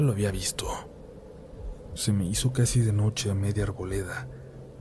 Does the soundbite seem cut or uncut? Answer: cut